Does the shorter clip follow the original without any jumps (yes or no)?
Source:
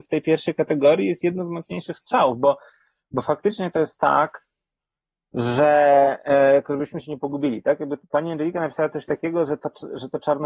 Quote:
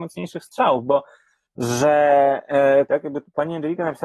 no